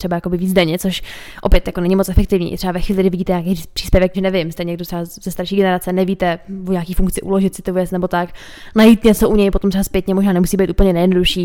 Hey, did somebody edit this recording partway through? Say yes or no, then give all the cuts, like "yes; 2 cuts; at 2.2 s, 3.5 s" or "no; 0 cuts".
yes; 1 cut; at 4.1 s